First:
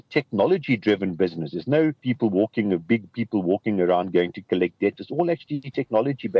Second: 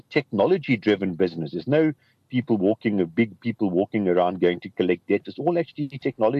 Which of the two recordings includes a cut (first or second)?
first